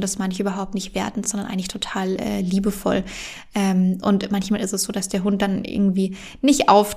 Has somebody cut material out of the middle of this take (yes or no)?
no